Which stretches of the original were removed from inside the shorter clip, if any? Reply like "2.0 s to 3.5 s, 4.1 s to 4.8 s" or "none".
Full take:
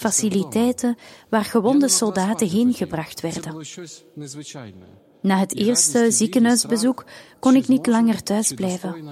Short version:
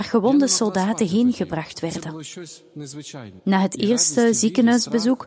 4.8 s to 5.2 s